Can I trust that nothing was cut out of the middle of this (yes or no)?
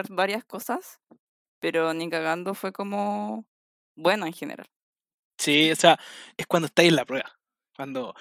no